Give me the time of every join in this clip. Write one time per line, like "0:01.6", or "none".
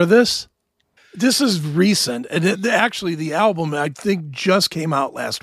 0:01.0

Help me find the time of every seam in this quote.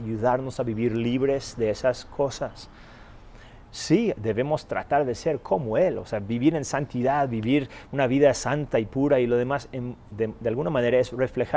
0:03.7

